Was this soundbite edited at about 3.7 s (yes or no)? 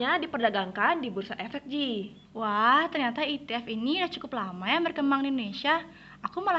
no